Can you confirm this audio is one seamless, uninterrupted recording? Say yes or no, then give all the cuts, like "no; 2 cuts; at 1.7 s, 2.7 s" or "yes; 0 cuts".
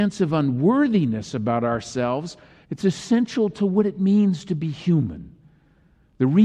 no; 1 cut; at 2.6 s